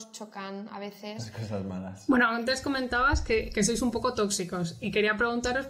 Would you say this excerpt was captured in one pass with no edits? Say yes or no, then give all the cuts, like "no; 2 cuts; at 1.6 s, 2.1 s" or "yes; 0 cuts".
no; 1 cut; at 2.1 s